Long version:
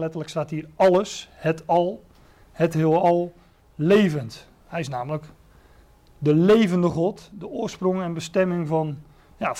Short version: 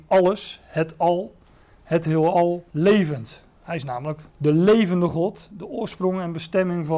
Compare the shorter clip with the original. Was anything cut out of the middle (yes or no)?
yes